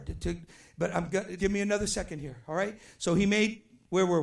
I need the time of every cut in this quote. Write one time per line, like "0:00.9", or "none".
0:01.4

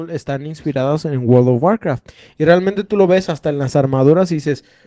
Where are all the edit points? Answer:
none

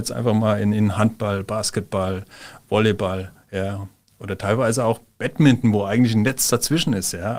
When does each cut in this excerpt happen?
none

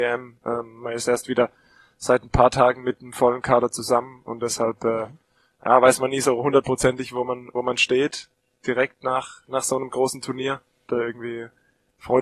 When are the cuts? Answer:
0:10.9

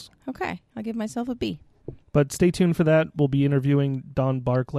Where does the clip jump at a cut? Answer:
0:02.0

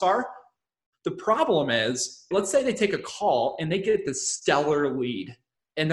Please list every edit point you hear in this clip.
0:02.3

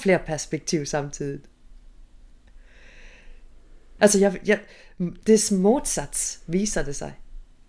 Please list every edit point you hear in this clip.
0:04.0

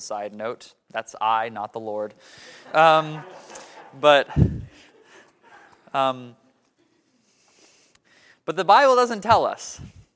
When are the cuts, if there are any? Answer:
none

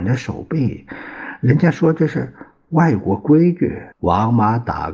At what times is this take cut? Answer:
0:03.9

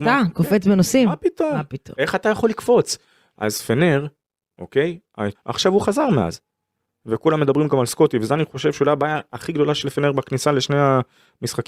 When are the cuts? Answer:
0:05.4

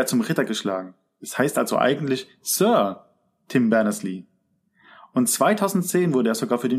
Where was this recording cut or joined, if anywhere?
none

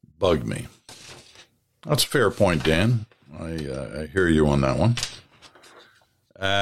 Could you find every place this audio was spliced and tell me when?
none

